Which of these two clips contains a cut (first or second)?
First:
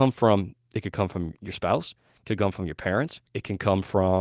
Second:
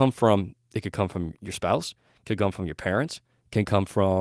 first